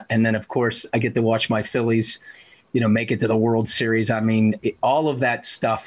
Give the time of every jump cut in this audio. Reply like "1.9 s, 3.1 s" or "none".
4.6 s